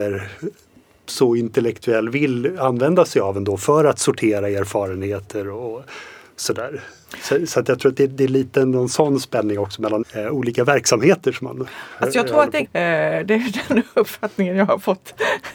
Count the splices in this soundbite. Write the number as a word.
two